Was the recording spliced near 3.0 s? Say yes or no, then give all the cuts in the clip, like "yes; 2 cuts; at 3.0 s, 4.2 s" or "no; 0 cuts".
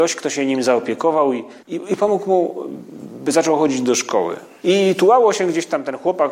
no; 2 cuts; at 1.6 s, 4.6 s